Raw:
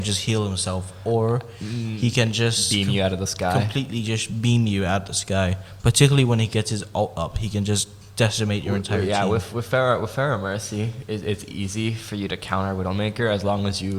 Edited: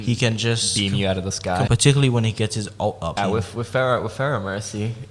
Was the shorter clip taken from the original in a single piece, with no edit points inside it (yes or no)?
no